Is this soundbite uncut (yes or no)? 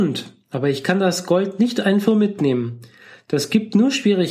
no